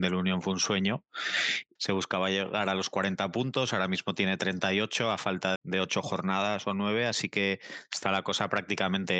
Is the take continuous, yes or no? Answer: no